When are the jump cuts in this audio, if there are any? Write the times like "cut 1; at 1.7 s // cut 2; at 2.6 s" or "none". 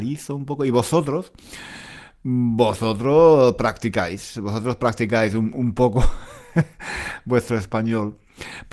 none